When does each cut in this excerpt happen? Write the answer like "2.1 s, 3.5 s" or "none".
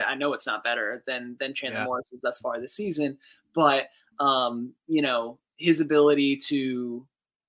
none